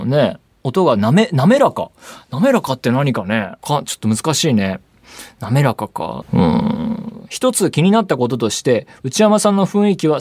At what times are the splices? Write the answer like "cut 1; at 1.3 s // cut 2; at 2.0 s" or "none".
cut 1; at 3.6 s // cut 2; at 6.2 s